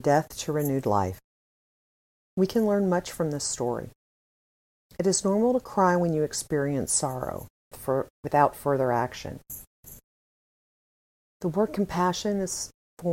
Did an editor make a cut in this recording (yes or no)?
yes